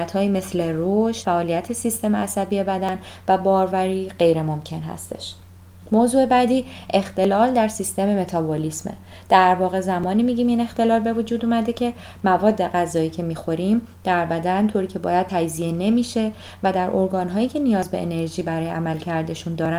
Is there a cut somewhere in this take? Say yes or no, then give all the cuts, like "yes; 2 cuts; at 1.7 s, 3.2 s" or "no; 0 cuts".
yes; 1 cut; at 1.2 s